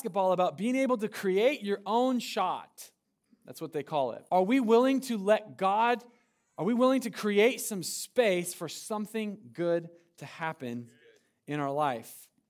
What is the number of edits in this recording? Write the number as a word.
one